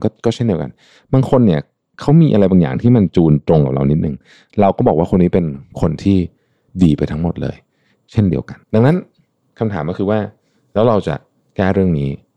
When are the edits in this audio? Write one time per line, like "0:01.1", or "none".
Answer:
0:08.6